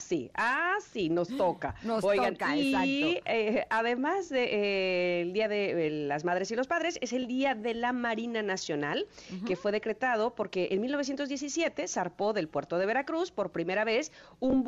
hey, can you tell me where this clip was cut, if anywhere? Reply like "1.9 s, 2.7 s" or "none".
none